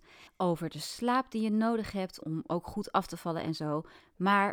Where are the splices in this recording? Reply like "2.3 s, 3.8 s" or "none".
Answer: 2.2 s